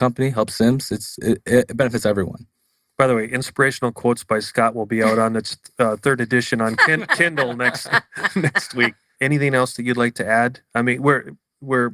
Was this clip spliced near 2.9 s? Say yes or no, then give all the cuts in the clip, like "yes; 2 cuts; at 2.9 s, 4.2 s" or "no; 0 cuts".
no; 0 cuts